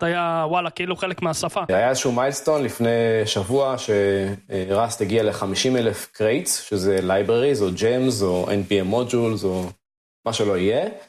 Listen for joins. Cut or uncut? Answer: cut